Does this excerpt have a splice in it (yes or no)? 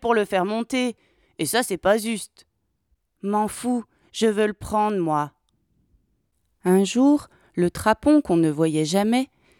no